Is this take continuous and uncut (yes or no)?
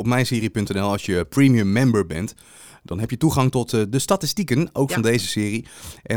yes